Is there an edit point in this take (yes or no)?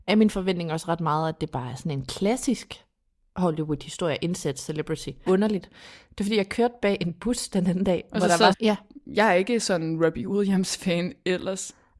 yes